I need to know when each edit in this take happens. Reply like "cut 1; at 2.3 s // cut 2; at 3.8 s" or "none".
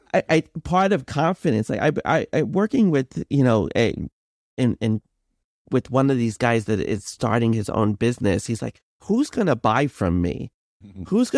none